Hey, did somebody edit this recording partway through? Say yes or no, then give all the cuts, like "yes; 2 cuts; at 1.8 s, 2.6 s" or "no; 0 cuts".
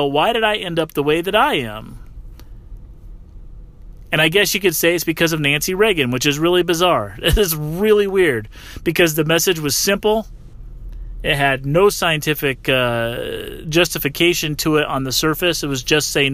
no; 0 cuts